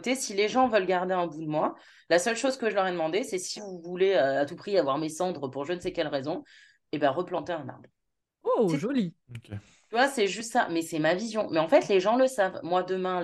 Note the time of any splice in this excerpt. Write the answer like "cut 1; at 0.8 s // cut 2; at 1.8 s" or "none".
cut 1; at 3.6 s